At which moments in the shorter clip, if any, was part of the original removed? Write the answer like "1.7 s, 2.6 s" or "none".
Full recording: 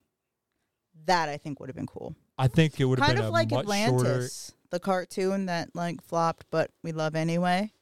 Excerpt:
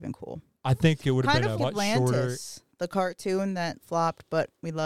1.6 s, 3.8 s